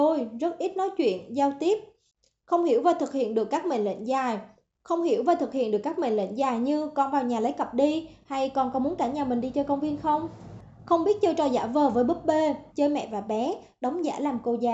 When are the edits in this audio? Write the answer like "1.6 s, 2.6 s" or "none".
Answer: 4.8 s, 12.7 s